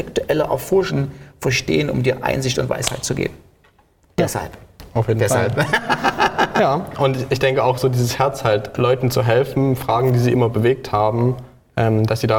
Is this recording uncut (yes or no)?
yes